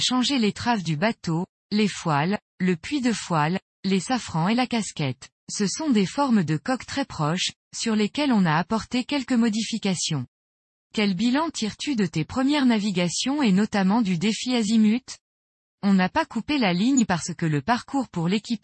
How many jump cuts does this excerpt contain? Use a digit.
1